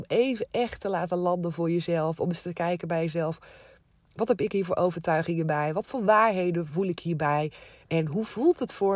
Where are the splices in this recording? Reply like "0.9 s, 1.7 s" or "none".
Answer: none